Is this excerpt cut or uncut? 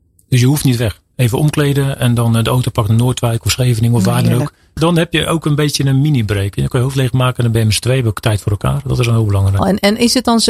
cut